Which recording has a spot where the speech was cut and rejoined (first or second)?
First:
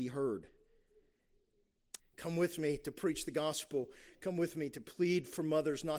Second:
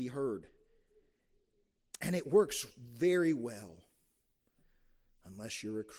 first